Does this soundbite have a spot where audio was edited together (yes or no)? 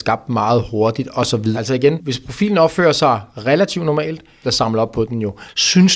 yes